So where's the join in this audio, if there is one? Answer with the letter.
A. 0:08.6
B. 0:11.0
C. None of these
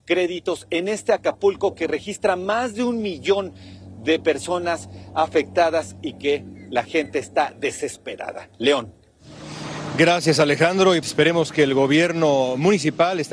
B